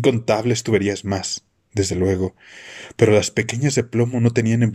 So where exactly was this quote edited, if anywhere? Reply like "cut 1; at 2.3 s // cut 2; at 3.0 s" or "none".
none